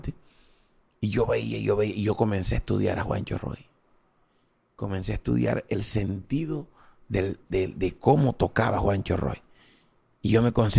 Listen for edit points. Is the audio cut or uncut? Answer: uncut